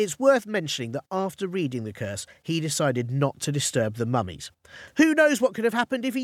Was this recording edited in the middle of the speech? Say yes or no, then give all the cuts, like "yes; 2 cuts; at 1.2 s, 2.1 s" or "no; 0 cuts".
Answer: no; 0 cuts